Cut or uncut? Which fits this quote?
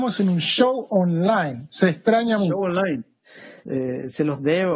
cut